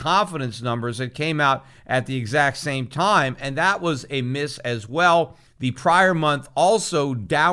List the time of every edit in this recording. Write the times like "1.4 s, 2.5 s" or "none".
none